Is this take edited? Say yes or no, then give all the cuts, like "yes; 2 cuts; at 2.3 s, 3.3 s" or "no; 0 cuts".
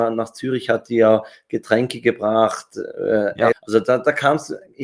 yes; 1 cut; at 3.5 s